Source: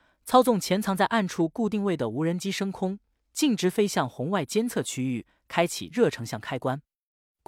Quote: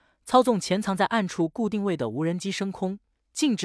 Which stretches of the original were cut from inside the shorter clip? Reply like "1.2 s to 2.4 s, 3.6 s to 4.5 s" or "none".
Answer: none